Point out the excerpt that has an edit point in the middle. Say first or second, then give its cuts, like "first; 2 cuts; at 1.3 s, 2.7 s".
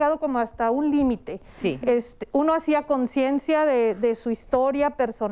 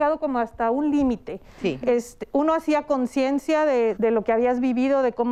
second; 1 cut; at 3.9 s